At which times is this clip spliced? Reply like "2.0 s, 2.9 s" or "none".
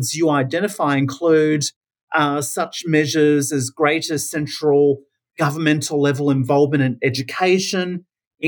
none